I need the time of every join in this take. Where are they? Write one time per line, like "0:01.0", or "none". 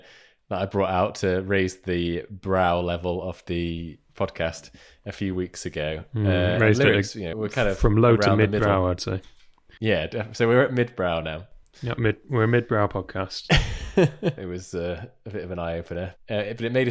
0:07.3
0:14.4